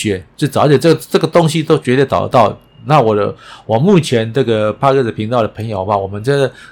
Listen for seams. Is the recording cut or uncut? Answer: uncut